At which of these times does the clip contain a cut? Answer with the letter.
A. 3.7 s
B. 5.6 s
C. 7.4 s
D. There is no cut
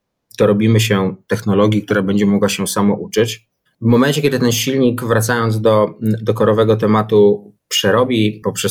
A